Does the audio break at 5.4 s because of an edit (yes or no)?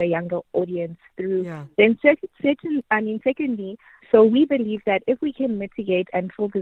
no